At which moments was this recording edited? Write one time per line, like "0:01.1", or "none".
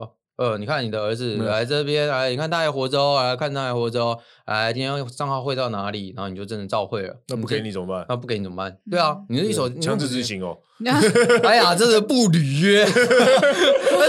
none